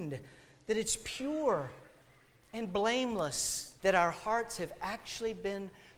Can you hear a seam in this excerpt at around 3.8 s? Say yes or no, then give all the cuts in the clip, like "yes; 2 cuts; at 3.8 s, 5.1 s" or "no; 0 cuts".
yes; 1 cut; at 3.8 s